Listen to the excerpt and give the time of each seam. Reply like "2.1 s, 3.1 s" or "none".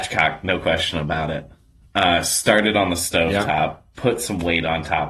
3.9 s